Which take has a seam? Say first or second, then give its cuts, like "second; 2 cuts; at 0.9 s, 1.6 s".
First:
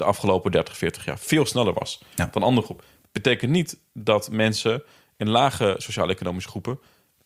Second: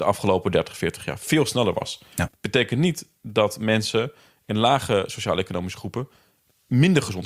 second; 1 cut; at 2.3 s